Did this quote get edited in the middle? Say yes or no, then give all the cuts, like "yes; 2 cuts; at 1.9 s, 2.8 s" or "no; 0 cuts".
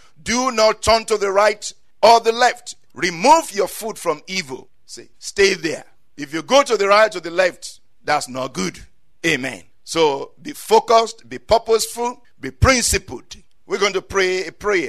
yes; 1 cut; at 5.1 s